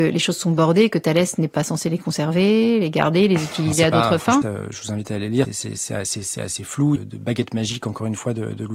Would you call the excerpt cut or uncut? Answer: cut